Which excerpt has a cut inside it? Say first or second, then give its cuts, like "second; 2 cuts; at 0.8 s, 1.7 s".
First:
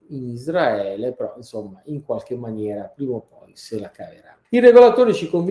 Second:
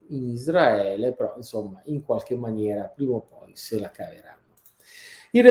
first; 1 cut; at 4.4 s